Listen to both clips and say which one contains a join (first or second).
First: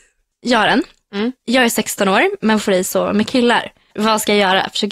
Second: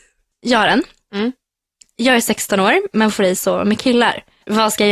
first